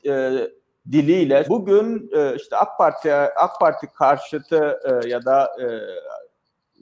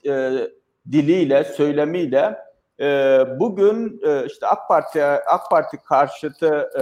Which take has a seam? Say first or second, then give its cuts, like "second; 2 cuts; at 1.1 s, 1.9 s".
first; 1 cut; at 1.5 s